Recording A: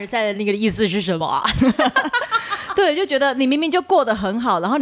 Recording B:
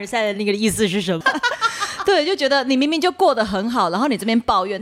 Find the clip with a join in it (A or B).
B